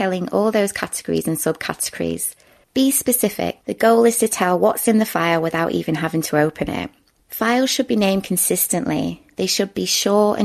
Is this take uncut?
yes; 0 cuts

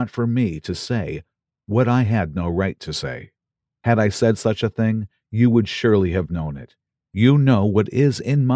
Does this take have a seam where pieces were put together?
no; 0 cuts

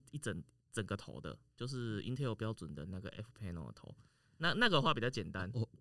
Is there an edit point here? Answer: no; 0 cuts

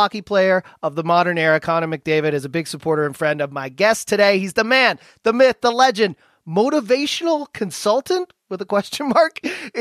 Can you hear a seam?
no; 0 cuts

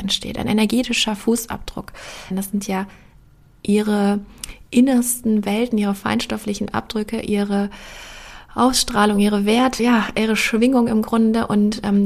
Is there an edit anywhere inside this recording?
yes; 2 cuts; at 2.3 s, 9.8 s

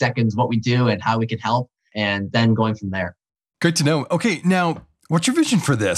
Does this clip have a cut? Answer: no; 0 cuts

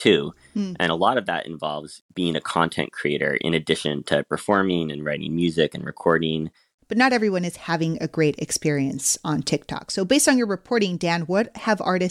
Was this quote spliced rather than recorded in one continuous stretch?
no; 0 cuts

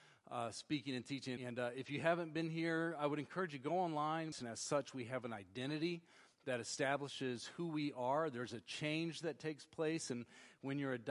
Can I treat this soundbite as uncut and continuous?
no; 2 cuts; at 1.4 s, 4.3 s

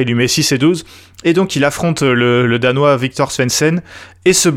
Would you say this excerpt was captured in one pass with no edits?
yes; 0 cuts

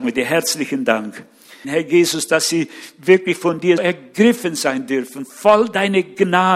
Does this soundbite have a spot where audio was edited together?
yes; 2 cuts; at 1.6 s, 3.8 s

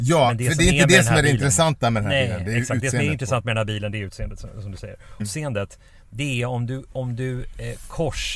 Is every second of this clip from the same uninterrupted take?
no; 1 cut; at 5.2 s

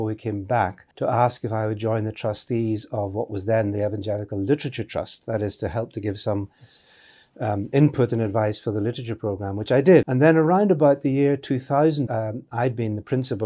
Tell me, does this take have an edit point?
yes; 3 cuts; at 0.9 s, 10.0 s, 12.1 s

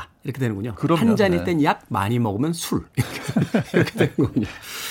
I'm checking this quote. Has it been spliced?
no; 0 cuts

